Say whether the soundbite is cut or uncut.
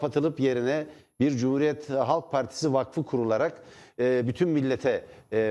uncut